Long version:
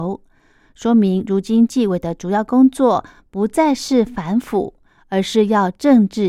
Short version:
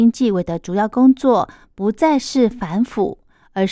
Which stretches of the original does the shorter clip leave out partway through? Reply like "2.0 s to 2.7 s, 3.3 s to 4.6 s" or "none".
none

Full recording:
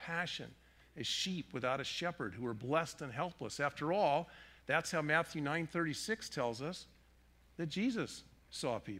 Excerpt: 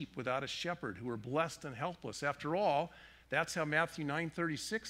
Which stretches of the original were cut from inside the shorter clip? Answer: none

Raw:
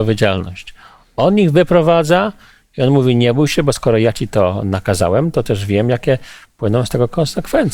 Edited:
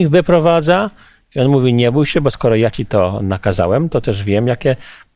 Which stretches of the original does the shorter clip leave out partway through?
none

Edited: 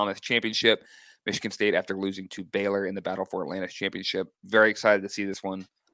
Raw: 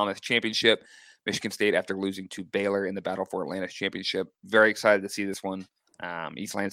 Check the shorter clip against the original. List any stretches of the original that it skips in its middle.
none

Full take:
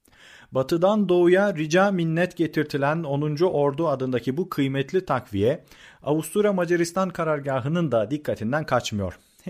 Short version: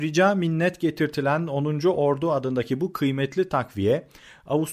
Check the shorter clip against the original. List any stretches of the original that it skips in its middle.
none

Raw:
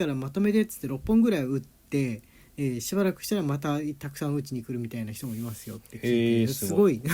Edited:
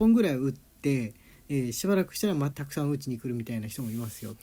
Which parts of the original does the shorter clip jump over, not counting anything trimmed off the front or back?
3.6 s to 4.0 s

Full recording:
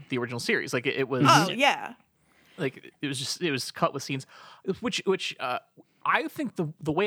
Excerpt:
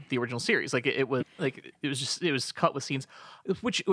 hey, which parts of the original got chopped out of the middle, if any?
1.2 s to 2.4 s

